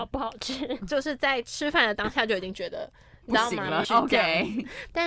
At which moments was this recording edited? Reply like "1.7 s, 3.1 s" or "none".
3.8 s